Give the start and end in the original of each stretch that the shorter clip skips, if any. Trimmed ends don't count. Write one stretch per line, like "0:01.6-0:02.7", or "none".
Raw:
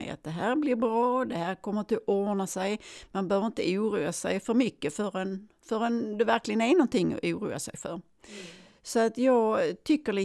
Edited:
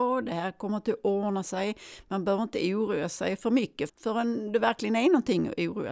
0:04.9-0:05.5